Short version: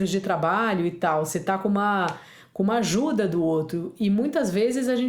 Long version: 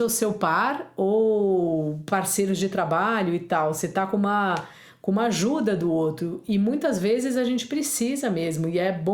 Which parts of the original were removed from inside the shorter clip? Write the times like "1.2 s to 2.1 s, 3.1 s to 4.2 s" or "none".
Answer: none